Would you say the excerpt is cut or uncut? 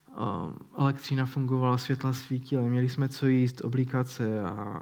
uncut